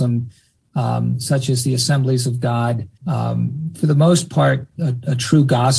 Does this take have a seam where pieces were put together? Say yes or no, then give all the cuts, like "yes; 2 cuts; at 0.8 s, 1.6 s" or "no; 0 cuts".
yes; 2 cuts; at 3.0 s, 4.8 s